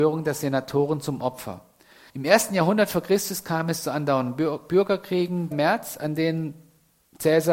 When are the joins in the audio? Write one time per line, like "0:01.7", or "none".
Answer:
0:02.1
0:05.5